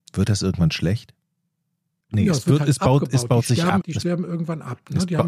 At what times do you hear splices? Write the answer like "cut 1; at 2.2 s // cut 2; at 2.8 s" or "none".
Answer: cut 1; at 2.0 s // cut 2; at 3.8 s